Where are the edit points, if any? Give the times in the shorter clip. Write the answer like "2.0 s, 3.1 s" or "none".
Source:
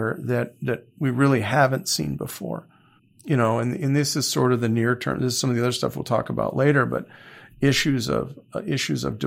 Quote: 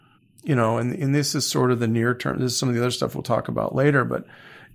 none